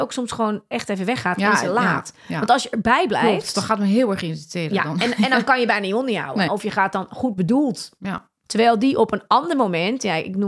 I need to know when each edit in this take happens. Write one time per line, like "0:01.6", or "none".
0:06.5
0:08.4